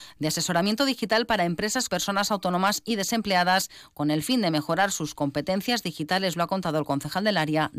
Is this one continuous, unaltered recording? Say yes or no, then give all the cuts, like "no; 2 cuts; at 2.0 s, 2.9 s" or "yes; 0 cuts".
no; 1 cut; at 1.9 s